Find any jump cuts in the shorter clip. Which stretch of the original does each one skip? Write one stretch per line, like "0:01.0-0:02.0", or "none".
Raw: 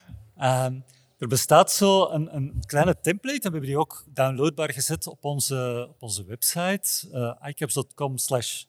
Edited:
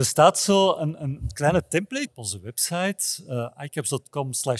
0:03.4-0:05.9